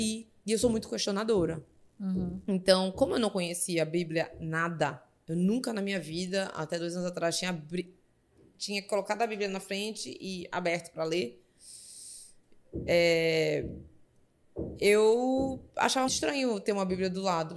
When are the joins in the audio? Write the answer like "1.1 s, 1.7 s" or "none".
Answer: 16.1 s